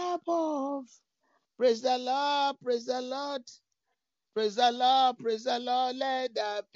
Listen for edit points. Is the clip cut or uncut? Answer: cut